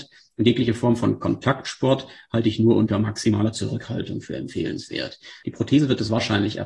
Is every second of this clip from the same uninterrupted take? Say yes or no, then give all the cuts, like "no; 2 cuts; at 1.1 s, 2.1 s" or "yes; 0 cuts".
yes; 0 cuts